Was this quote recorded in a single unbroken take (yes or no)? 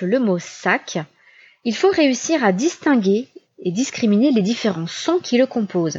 yes